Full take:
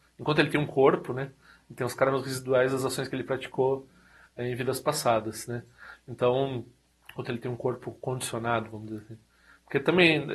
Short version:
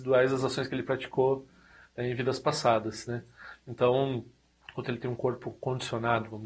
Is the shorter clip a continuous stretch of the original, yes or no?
yes